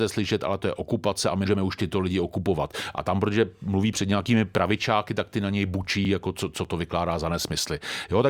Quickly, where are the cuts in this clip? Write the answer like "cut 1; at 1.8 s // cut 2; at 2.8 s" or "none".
cut 1; at 1.5 s

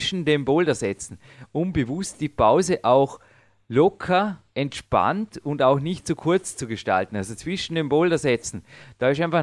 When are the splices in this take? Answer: none

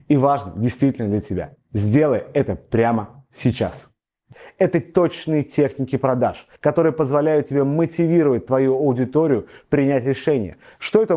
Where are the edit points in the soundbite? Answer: cut 1; at 6.6 s

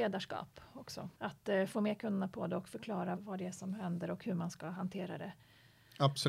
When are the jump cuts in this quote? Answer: cut 1; at 1.1 s // cut 2; at 3.2 s

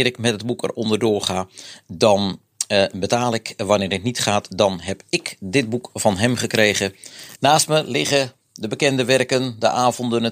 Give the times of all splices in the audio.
cut 1; at 7.4 s

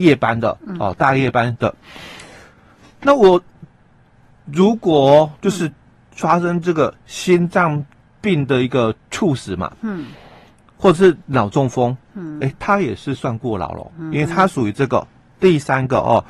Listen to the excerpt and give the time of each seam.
none

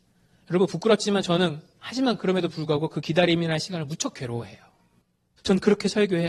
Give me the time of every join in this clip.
cut 1; at 5.4 s

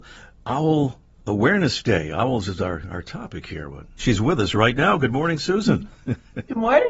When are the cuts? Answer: cut 1; at 4.0 s

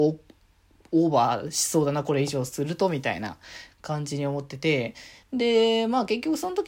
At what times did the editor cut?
none

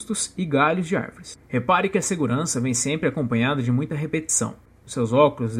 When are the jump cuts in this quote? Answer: cut 1; at 1.4 s

